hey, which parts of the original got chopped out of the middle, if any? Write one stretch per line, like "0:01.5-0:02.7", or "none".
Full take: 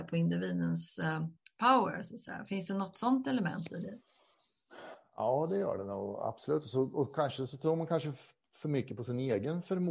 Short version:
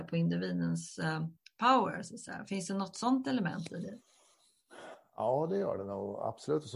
none

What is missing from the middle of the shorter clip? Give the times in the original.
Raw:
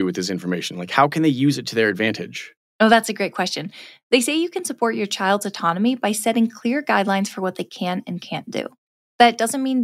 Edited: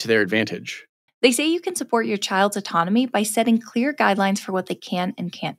0:02.8-0:04.0

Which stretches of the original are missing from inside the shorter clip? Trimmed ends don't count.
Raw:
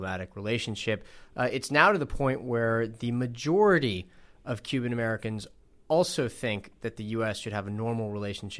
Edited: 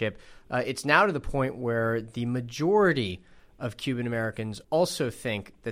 0:05.5-0:05.8

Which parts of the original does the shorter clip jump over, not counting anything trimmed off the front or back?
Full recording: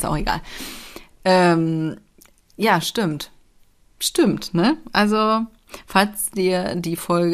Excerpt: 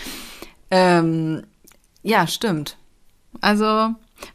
0:03.9-0:04.8

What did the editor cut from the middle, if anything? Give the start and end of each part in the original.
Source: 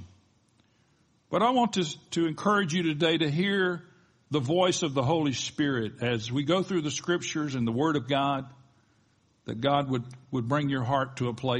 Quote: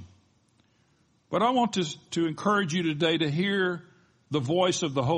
none

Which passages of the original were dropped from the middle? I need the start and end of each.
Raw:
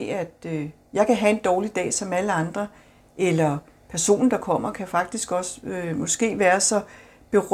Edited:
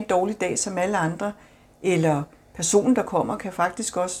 none

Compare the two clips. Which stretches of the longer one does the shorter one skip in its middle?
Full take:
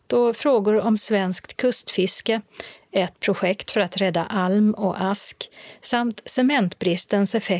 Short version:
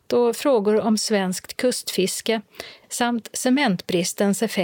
0:02.8-0:05.8

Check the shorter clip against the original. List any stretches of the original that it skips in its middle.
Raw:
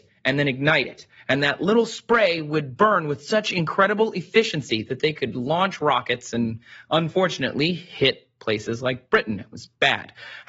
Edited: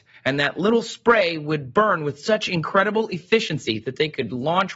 none

